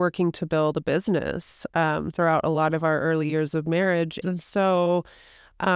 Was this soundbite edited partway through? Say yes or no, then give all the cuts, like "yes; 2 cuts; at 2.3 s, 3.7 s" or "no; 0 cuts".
yes; 1 cut; at 4.2 s